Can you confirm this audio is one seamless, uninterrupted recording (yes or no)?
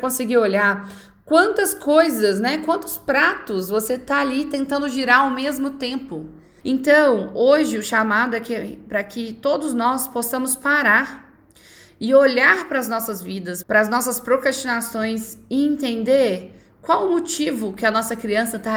no